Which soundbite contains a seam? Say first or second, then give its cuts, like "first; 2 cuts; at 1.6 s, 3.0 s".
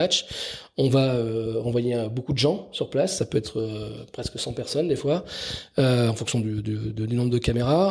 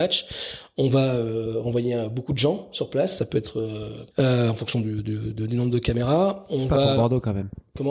second; 1 cut; at 4.1 s